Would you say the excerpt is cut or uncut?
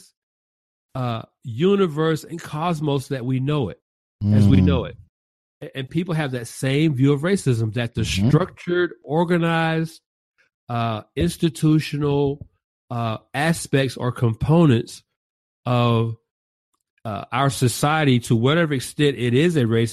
uncut